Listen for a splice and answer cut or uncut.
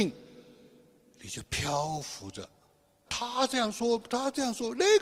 cut